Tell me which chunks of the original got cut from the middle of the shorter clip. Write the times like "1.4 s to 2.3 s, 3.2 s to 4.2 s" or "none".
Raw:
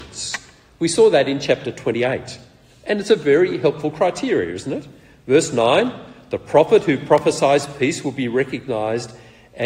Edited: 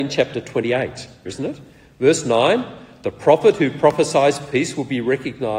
2.6 s to 4.5 s